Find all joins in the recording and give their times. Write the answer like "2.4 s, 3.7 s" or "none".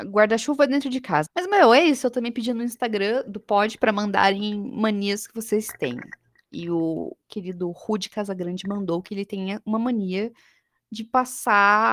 1.2 s